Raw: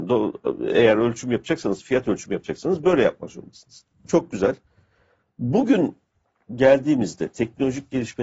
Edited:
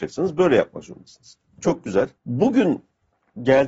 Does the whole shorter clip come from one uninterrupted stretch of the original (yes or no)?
no